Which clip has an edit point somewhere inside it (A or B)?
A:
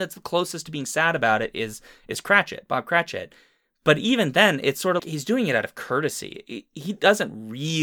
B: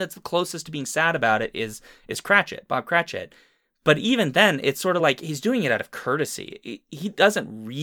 A